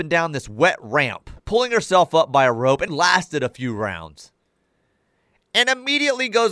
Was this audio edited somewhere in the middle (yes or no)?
yes